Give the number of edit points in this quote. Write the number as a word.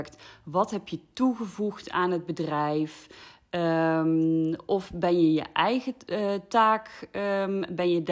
zero